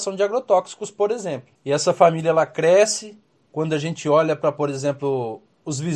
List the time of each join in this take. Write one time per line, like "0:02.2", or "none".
0:01.6